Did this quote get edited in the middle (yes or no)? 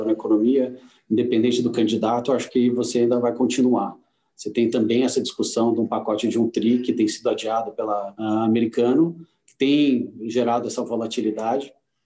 yes